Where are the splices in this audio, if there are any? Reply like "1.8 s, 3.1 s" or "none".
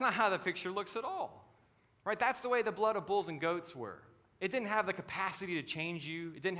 none